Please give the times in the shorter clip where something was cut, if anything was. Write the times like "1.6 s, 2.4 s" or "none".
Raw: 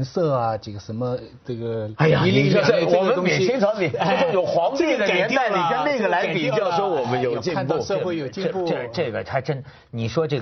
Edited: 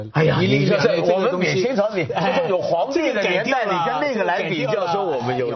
none